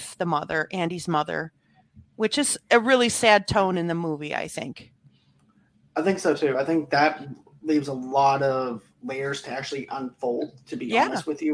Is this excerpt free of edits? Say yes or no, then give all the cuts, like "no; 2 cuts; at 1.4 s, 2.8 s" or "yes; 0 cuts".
yes; 0 cuts